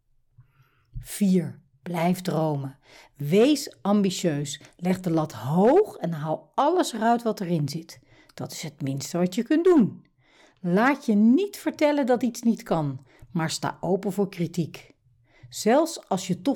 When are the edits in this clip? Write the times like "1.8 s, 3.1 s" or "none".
none